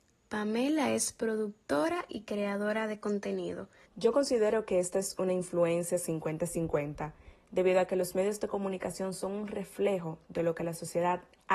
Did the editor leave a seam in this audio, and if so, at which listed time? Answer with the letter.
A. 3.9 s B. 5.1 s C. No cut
A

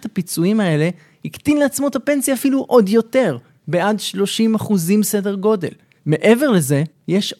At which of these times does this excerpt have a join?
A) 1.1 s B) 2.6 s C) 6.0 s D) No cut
C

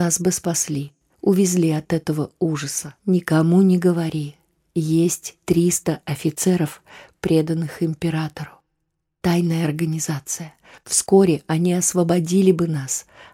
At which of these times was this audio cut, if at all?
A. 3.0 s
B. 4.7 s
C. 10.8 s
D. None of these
A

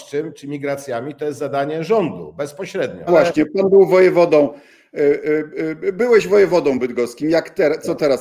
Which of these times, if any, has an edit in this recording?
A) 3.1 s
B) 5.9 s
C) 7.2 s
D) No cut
A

